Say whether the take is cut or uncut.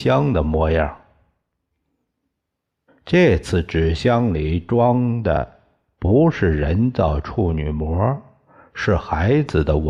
cut